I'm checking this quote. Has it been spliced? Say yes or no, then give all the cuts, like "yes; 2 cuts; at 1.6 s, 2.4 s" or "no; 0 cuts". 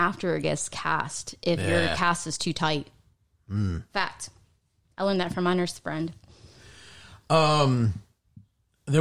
no; 0 cuts